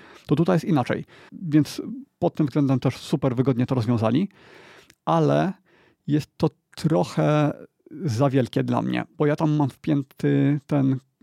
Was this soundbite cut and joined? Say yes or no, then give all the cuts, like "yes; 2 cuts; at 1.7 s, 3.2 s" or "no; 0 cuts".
yes; 1 cut; at 1.3 s